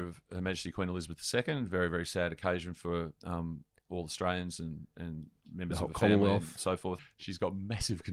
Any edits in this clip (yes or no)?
yes